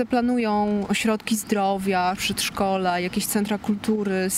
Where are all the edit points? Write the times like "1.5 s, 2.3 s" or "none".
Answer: 2.2 s